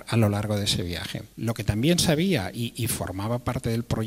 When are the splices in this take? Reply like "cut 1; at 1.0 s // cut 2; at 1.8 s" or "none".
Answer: cut 1; at 1.3 s